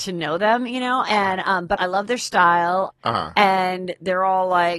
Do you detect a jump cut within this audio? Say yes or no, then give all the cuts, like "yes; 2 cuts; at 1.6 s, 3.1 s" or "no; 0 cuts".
yes; 2 cuts; at 1.8 s, 2.9 s